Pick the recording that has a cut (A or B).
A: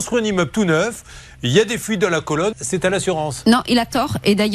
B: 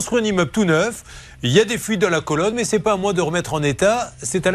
A